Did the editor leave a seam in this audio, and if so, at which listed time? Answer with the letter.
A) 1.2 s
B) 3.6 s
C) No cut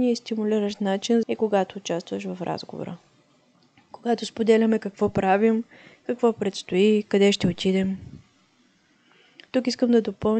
A